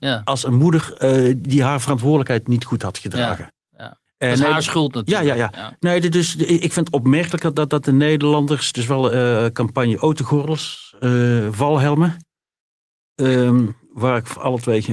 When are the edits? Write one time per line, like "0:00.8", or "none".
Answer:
none